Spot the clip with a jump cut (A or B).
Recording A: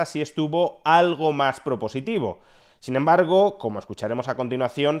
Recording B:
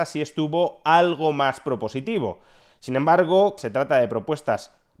B